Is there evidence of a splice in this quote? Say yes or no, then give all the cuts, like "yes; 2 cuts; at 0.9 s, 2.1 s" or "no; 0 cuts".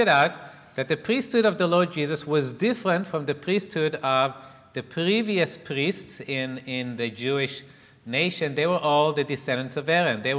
no; 0 cuts